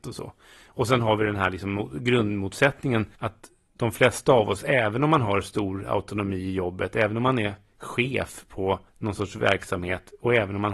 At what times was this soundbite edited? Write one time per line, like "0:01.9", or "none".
0:03.1
0:08.9